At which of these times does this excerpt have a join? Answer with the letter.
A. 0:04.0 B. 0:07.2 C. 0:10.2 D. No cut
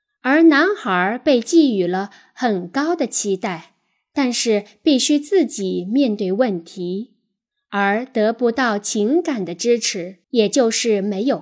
C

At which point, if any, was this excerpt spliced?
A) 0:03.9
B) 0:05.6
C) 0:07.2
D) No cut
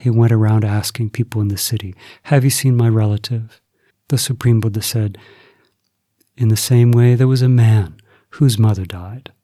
A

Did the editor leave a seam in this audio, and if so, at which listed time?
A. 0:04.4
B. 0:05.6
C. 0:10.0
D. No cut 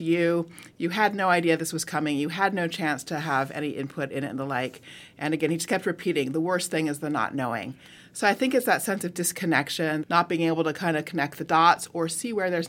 C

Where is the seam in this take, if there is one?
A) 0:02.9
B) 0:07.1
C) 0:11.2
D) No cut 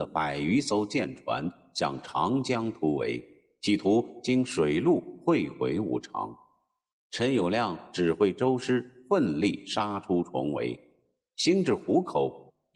B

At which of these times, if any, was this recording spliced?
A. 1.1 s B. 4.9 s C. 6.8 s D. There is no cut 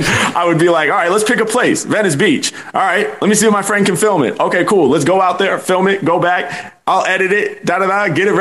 D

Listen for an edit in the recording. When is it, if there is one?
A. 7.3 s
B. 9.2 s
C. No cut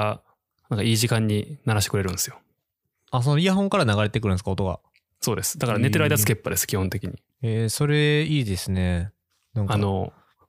A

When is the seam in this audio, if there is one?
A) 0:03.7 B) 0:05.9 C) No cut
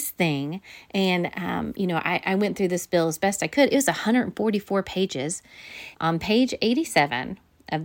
B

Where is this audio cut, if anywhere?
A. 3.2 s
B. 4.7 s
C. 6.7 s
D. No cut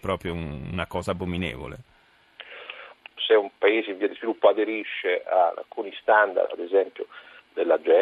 A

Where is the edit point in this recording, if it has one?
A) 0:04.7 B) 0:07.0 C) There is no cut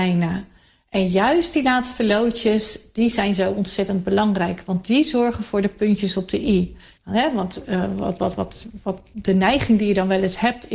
B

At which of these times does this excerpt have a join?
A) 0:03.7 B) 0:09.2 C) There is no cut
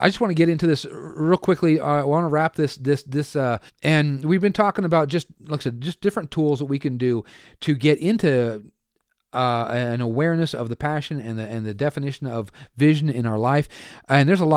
A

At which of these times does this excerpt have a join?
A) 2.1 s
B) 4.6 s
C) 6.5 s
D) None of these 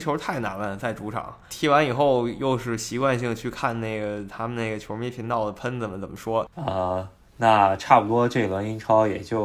C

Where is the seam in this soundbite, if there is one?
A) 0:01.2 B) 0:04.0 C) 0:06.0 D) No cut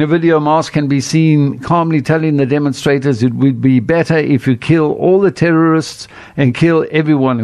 D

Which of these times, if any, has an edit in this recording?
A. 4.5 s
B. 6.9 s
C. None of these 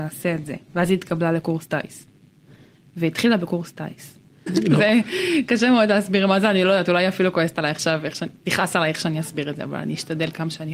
A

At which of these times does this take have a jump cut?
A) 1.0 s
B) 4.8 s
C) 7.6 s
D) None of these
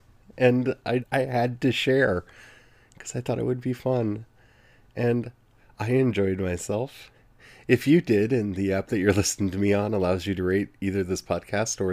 A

